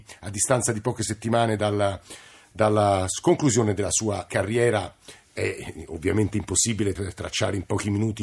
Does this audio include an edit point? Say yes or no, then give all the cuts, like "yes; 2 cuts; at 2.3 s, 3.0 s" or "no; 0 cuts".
yes; 2 cuts; at 4.3 s, 7.0 s